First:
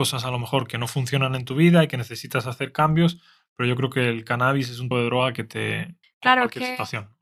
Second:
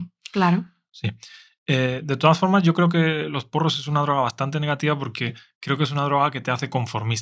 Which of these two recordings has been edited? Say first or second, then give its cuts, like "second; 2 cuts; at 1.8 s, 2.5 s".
first; 2 cuts; at 4.9 s, 6.0 s